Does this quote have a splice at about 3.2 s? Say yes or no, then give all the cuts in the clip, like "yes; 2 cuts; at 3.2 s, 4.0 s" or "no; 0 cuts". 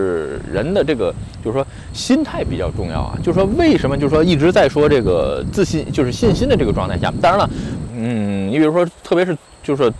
no; 1 cut; at 7.9 s